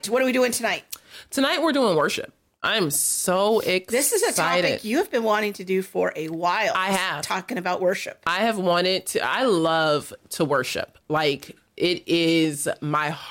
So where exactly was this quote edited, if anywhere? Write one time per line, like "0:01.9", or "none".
none